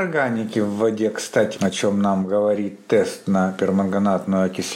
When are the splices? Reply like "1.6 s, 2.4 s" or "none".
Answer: 1.5 s